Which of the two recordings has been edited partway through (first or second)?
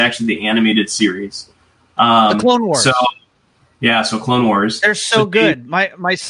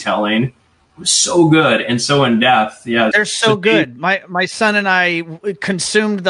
second